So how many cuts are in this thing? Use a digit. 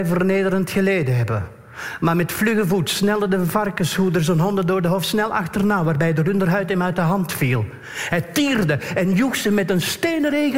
0